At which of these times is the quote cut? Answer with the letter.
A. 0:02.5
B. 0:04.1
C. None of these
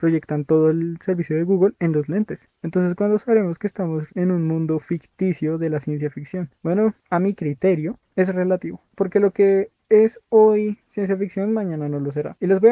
B